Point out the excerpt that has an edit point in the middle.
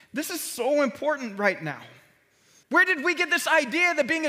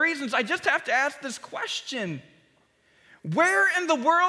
first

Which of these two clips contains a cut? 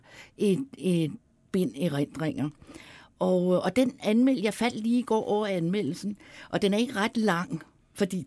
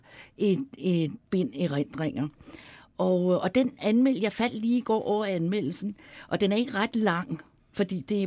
second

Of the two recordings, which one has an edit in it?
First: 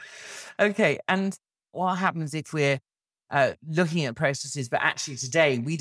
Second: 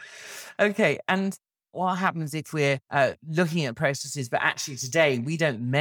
second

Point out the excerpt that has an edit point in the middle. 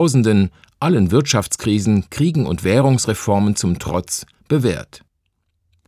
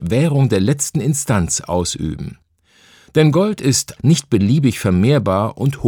second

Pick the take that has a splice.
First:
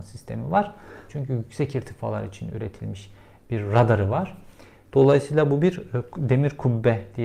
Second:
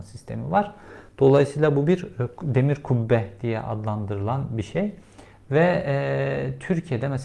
first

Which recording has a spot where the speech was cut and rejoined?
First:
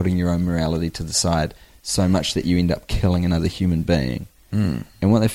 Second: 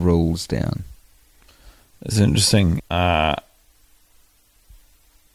second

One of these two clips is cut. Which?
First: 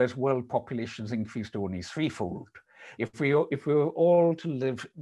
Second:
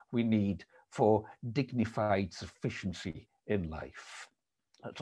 first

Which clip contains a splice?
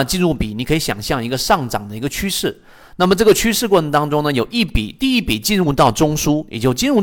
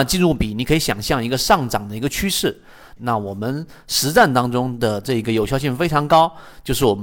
second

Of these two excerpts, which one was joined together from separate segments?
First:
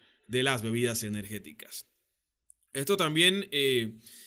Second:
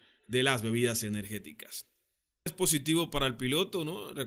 second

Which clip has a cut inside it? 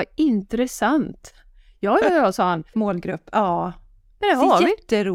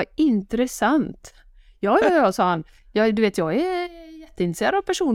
first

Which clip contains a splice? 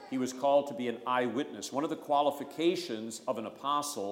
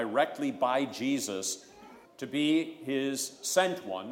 second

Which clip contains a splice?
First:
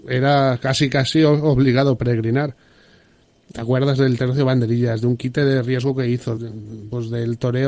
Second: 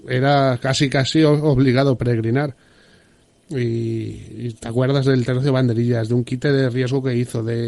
first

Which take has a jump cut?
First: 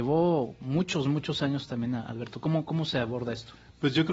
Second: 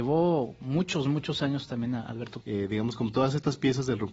second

